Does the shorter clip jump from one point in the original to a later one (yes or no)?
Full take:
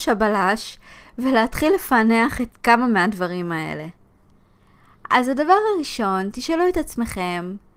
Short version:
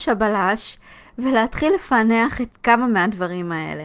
no